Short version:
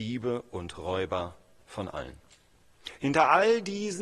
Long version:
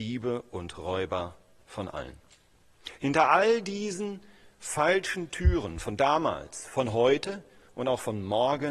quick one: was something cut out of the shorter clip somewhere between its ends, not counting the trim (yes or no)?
no